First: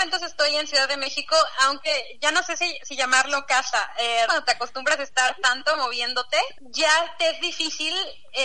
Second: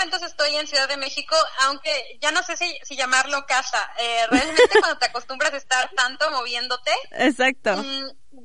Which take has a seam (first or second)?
first